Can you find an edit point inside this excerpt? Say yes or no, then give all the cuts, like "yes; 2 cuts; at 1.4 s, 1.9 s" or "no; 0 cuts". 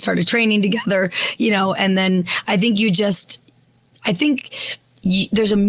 no; 0 cuts